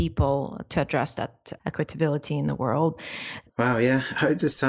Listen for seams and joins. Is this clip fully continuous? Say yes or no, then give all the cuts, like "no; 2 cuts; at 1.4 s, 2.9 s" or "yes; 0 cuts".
no; 1 cut; at 3.5 s